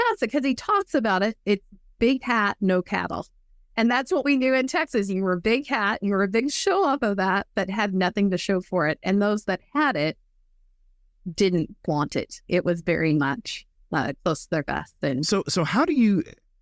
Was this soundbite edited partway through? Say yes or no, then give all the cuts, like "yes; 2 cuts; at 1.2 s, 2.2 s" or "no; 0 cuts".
no; 0 cuts